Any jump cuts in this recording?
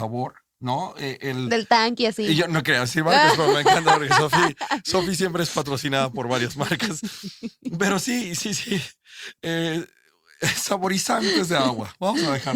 no; 0 cuts

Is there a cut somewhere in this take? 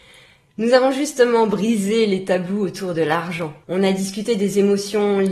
yes; 1 cut; at 3.6 s

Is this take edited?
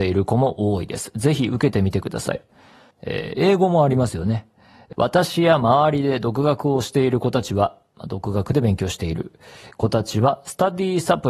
yes; 2 cuts; at 2.9 s, 4.9 s

